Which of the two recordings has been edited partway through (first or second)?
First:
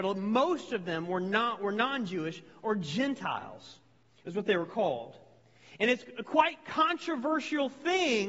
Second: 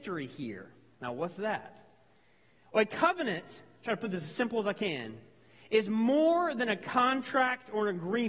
second